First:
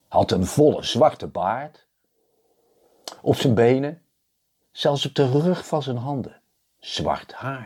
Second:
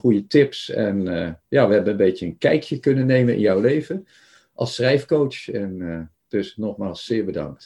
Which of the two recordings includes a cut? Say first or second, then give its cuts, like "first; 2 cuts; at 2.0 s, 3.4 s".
first; 1 cut; at 4.6 s